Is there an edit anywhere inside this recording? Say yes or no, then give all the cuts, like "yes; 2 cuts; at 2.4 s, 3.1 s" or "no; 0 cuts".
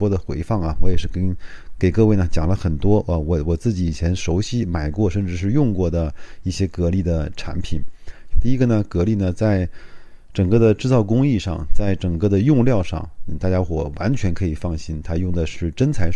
yes; 1 cut; at 8.3 s